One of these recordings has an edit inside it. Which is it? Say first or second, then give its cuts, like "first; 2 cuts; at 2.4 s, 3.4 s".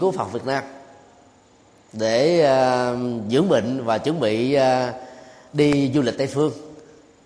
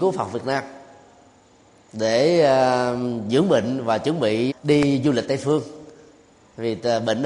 second; 1 cut; at 4.5 s